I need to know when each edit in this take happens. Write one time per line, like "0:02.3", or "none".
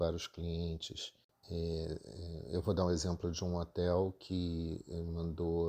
0:01.3